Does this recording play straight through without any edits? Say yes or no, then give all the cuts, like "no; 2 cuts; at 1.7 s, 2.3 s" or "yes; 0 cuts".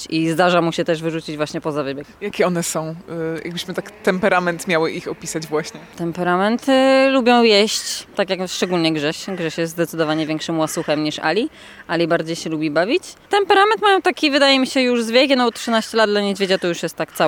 yes; 0 cuts